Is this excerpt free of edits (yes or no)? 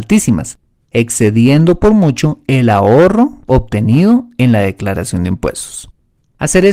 yes